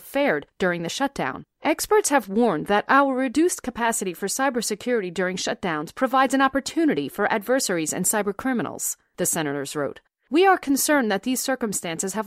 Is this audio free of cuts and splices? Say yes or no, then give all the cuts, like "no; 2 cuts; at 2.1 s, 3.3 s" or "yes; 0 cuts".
yes; 0 cuts